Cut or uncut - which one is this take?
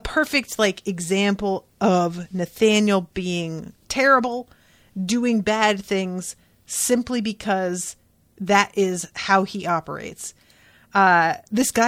uncut